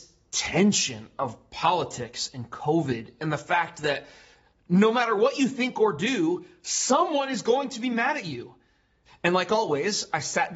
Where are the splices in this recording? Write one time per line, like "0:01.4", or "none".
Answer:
0:09.1